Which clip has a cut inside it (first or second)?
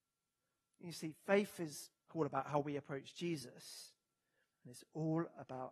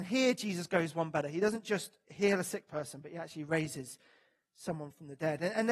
first